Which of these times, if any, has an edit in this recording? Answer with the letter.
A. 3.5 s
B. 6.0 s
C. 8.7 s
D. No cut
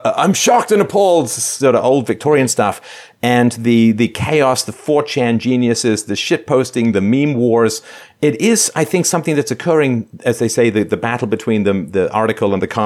D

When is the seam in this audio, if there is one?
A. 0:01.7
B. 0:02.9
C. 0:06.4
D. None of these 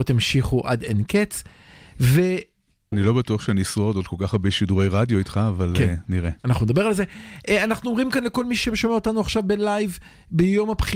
B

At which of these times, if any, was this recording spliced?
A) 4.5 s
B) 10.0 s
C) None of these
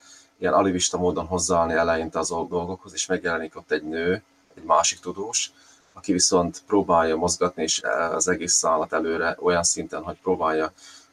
C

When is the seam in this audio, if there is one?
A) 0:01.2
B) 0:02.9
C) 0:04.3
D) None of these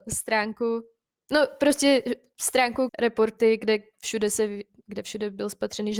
B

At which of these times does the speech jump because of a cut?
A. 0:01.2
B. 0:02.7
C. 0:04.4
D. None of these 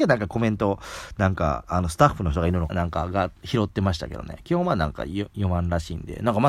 B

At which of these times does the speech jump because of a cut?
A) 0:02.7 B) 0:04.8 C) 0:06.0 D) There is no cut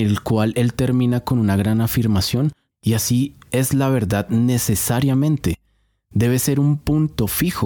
A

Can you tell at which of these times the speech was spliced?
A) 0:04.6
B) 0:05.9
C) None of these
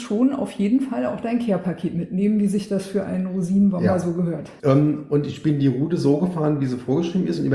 A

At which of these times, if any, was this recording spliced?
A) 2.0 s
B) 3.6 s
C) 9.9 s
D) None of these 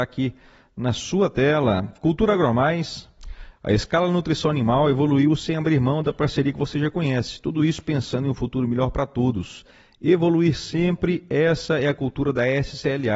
B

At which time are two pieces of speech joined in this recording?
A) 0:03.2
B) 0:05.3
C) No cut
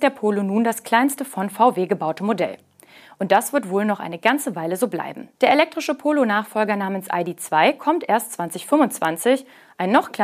B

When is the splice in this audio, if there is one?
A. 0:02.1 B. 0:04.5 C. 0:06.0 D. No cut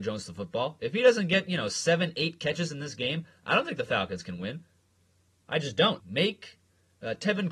C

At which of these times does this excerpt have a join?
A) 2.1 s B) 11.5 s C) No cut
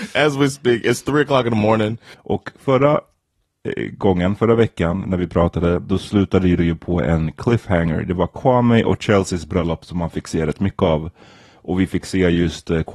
A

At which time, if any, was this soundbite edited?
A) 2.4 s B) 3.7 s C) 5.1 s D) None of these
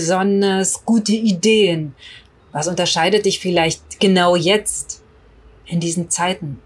A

